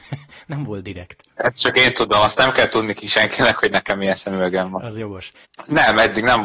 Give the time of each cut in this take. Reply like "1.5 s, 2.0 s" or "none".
5.4 s